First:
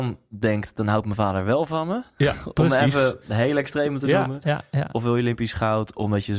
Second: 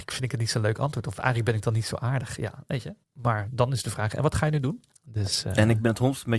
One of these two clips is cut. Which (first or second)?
second